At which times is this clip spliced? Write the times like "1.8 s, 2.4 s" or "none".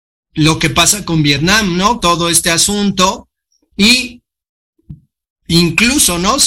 2.0 s